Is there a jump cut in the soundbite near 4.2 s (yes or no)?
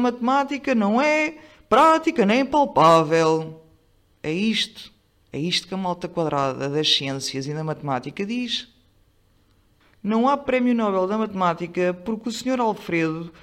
no